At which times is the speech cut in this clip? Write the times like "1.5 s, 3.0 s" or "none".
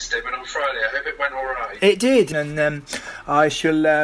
2.3 s